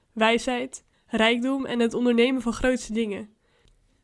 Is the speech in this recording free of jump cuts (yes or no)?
no